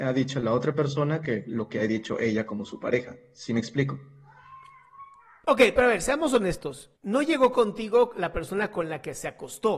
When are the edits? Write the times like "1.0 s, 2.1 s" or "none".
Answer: 7.0 s